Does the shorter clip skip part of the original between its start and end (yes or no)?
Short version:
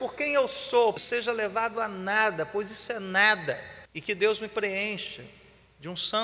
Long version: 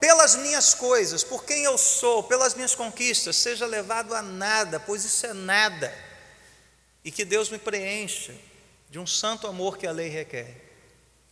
yes